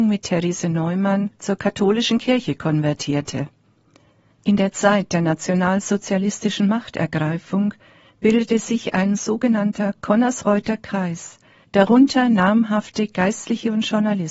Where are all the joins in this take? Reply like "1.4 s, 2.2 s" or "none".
4.3 s, 11.6 s